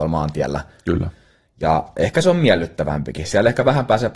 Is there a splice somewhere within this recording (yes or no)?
no